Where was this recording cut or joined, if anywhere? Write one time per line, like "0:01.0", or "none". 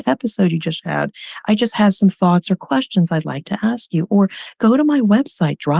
none